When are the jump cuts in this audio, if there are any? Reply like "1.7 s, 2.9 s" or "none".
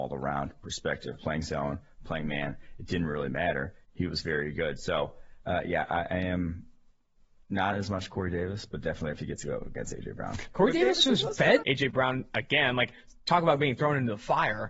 11.6 s